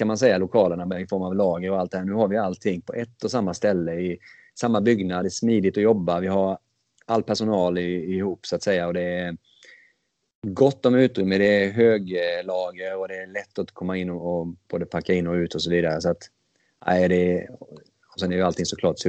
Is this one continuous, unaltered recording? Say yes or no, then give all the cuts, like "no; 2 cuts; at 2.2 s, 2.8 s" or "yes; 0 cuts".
yes; 0 cuts